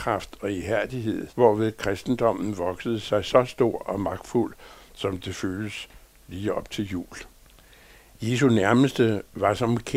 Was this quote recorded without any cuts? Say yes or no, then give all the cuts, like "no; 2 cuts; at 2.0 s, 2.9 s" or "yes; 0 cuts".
no; 1 cut; at 1.3 s